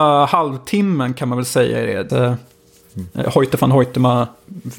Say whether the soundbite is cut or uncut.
cut